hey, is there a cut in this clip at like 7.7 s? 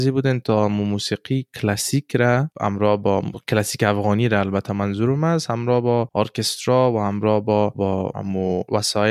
yes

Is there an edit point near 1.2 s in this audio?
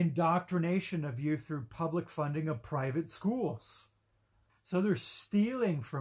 no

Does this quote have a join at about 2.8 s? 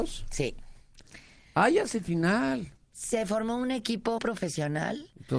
yes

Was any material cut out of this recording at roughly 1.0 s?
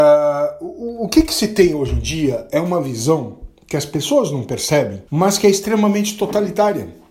no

